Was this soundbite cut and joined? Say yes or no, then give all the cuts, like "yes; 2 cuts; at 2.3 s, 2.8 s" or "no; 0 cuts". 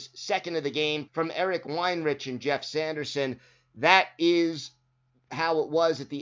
yes; 1 cut; at 1.1 s